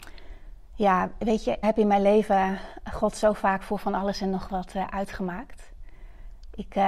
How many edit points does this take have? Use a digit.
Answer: 1